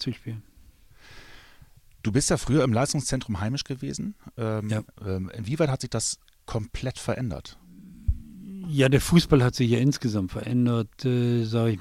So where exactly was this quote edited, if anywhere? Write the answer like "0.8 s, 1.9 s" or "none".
4.9 s